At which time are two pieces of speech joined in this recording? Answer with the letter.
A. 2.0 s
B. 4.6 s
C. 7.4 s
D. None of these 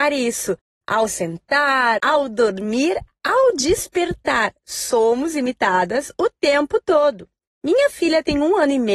A